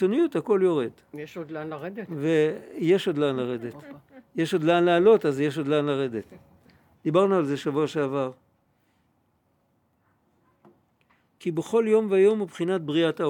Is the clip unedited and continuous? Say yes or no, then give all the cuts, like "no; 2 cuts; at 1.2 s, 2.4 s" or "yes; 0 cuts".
no; 1 cut; at 6.9 s